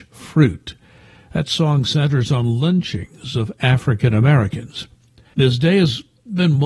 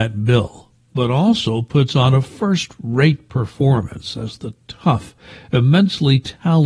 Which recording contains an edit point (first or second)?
first